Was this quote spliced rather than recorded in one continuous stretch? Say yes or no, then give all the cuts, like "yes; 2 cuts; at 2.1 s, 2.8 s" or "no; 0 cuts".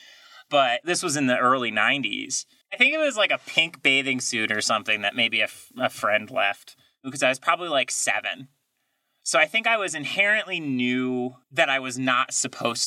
yes; 2 cuts; at 2.6 s, 11.4 s